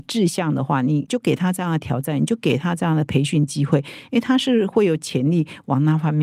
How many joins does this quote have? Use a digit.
0